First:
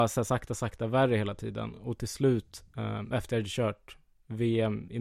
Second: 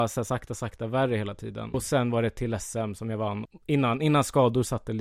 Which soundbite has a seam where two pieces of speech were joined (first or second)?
second